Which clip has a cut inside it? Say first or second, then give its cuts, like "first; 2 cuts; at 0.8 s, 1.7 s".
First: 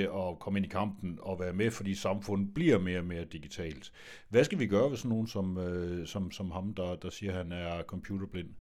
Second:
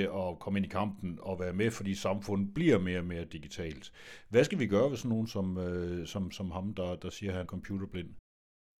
second; 1 cut; at 7.4 s